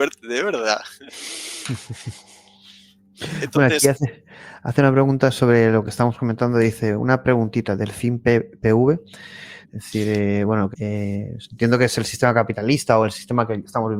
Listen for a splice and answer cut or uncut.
cut